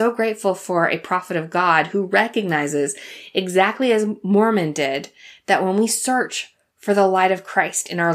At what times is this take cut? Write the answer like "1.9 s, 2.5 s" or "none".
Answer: none